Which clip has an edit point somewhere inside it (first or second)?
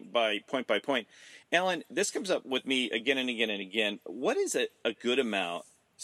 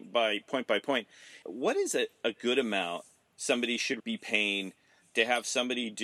second